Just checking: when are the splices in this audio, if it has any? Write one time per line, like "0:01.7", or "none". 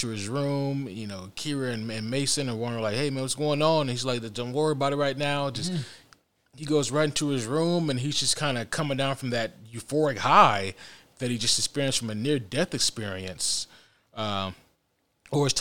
none